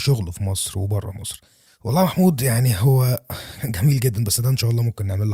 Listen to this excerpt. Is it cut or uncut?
cut